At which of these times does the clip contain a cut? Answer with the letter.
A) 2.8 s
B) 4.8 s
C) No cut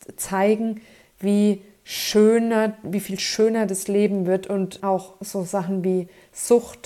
B